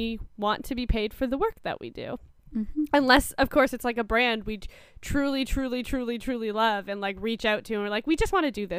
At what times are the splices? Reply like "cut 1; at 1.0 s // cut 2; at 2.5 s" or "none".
none